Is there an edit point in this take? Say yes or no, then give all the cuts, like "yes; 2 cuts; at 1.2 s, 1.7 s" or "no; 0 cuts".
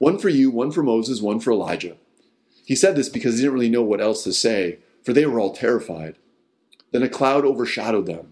no; 0 cuts